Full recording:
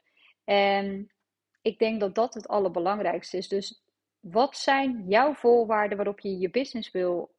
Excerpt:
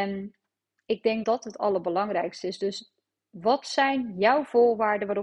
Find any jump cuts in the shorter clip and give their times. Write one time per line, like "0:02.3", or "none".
0:01.2